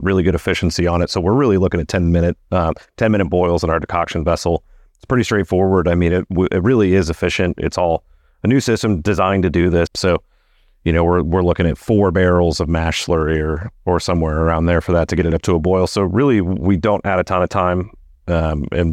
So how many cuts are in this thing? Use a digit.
2